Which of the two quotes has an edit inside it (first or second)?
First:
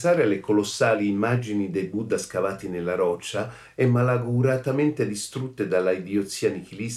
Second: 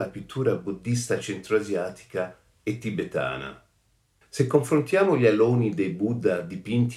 second